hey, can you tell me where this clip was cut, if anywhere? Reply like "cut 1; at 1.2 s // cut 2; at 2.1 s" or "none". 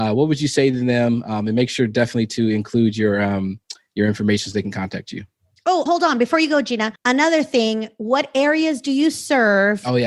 cut 1; at 5.9 s // cut 2; at 7.0 s